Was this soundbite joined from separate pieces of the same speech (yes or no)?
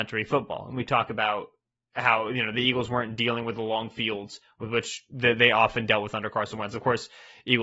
no